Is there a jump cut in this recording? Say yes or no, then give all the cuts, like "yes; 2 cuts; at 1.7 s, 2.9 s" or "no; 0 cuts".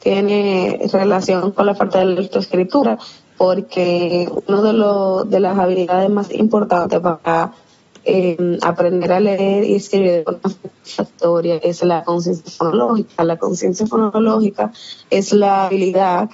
no; 0 cuts